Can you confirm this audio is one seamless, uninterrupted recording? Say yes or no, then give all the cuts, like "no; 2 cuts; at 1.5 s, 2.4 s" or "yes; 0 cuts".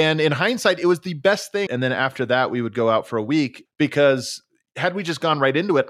no; 2 cuts; at 1.7 s, 3.7 s